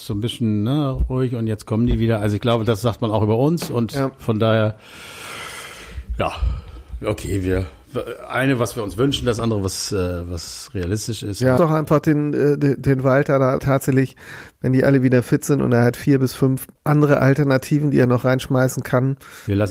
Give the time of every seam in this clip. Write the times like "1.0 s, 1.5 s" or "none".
11.6 s, 13.6 s, 16.8 s